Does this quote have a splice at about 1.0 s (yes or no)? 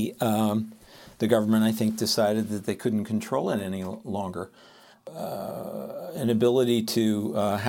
no